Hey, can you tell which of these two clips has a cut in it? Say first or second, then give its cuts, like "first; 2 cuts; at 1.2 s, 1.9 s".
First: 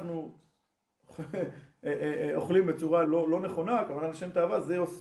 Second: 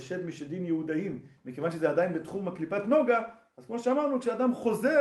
first; 1 cut; at 3.0 s